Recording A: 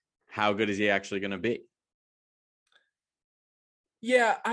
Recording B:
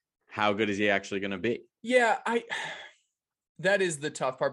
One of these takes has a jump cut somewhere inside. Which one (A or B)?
B